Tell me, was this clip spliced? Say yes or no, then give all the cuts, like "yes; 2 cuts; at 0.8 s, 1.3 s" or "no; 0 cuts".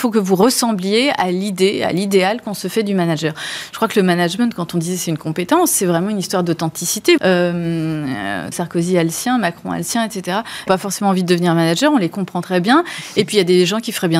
yes; 3 cuts; at 7.2 s, 8.5 s, 10.7 s